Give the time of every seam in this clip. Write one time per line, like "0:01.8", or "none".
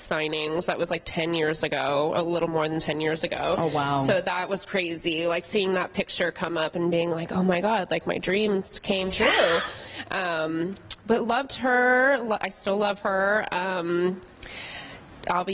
none